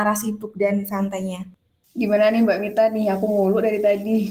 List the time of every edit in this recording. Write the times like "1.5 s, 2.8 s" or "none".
none